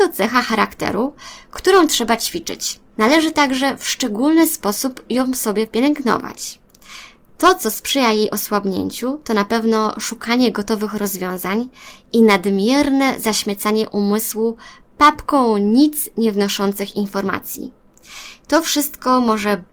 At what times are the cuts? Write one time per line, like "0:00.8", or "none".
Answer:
0:02.9
0:18.4